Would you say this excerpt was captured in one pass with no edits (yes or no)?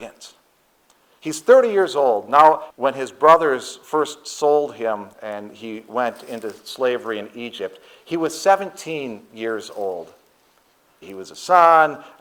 no